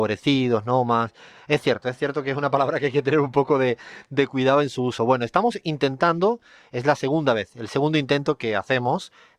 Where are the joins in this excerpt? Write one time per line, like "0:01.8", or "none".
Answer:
none